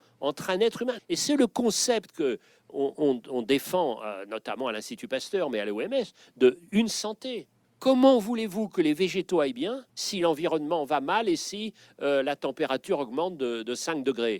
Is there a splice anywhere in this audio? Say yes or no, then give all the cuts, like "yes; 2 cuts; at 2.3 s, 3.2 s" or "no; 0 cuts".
yes; 3 cuts; at 1.0 s, 7.6 s, 9.9 s